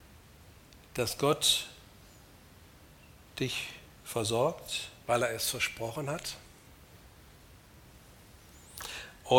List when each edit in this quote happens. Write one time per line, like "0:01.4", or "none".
0:05.0